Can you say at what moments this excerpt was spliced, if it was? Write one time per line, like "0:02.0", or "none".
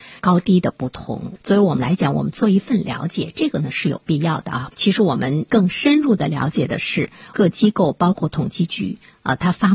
0:04.7